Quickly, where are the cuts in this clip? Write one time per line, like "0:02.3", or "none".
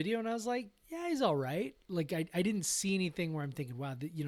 0:01.8